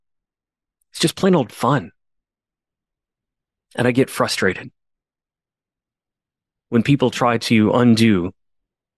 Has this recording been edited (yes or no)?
yes